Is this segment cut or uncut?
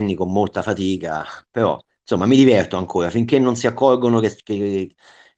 uncut